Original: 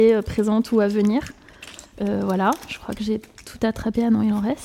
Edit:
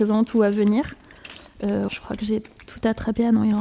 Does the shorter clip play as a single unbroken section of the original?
no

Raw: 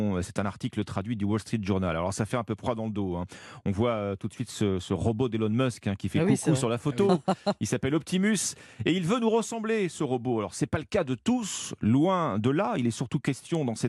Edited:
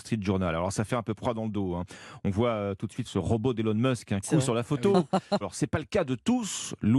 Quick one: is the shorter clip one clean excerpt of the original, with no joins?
no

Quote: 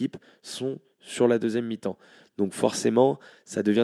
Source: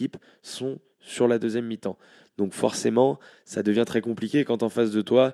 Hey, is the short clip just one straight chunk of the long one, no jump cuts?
yes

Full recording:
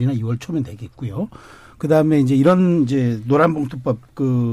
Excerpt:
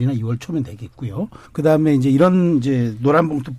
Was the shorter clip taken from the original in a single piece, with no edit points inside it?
no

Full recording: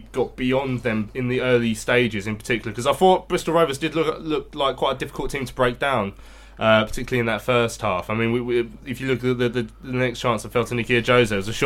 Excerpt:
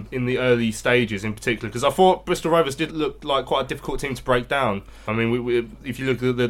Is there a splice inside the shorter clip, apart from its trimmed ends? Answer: yes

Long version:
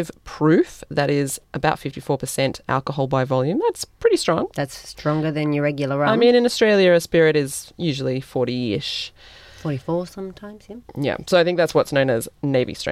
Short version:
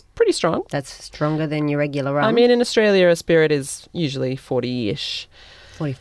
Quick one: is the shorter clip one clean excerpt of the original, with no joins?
yes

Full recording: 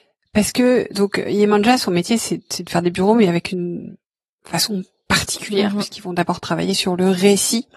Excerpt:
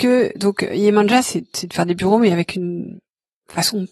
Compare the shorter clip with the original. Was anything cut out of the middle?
yes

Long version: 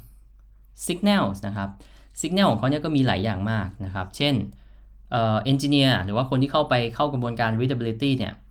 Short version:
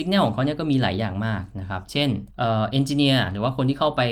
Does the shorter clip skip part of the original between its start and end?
yes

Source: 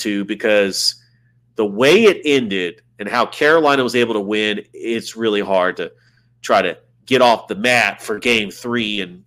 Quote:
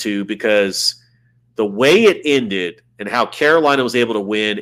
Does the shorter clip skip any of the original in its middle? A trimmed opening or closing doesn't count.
no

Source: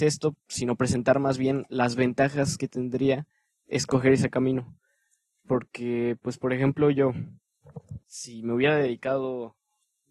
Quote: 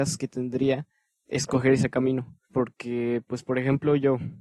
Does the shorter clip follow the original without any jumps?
no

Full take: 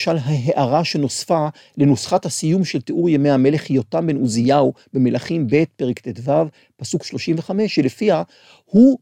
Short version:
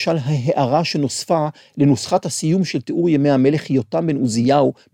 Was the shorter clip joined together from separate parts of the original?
no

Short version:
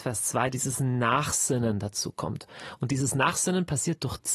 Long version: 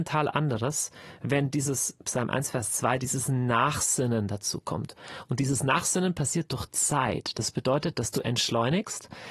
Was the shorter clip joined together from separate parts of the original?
no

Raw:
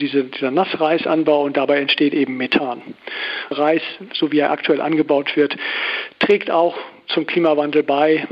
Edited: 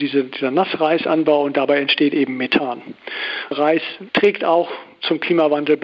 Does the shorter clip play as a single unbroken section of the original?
no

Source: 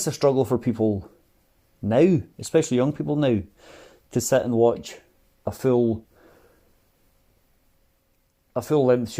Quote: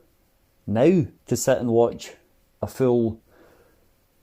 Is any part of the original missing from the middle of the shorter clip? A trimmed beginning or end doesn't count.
yes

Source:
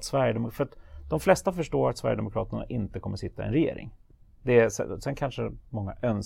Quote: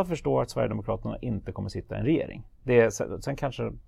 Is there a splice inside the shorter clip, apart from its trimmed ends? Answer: yes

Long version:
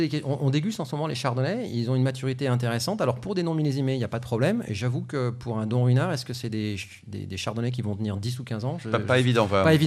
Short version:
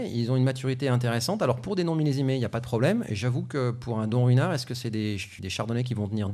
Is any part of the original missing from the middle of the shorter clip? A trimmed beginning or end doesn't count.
yes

